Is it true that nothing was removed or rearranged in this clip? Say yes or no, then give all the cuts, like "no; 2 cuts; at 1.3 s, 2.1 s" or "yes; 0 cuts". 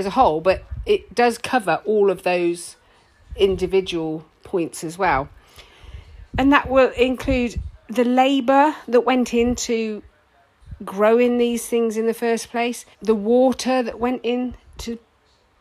no; 2 cuts; at 6.3 s, 12.9 s